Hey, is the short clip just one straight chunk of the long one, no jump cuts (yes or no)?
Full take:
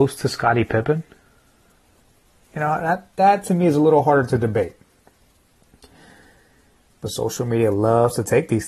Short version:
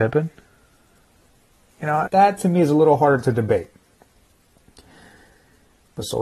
no